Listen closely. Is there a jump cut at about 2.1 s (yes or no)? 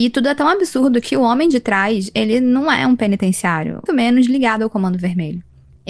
no